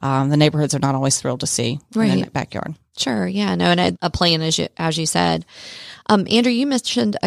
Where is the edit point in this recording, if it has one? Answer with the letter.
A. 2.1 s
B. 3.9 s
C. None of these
B